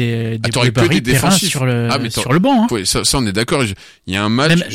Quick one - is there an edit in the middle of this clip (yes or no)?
yes